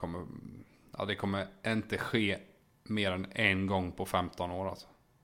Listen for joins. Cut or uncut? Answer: uncut